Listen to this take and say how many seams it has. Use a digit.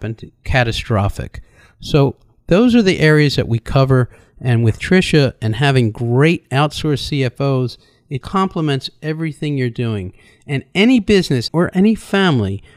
2